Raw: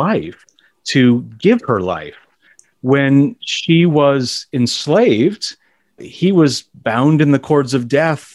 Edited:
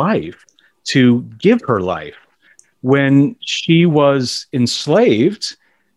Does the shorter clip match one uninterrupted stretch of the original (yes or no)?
yes